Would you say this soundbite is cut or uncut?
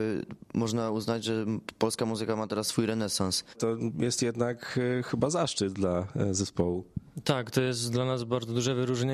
cut